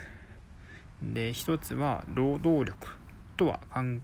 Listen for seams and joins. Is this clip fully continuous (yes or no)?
yes